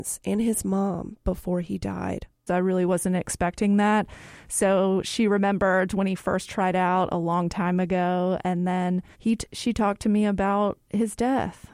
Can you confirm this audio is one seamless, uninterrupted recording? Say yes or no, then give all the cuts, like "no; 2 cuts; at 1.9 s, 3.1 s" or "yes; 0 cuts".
no; 2 cuts; at 2.5 s, 9.1 s